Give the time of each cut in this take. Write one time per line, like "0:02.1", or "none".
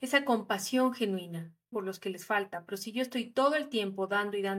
0:01.7